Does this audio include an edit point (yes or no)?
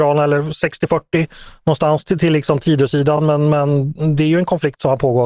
no